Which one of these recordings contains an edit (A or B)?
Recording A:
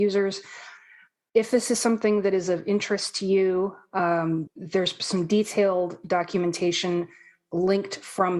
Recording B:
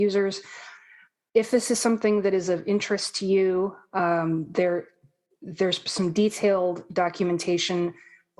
A